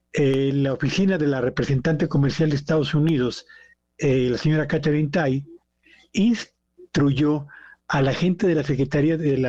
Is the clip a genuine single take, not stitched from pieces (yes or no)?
yes